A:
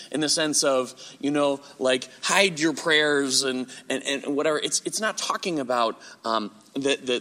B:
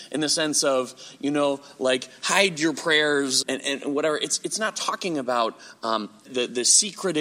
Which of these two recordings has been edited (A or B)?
B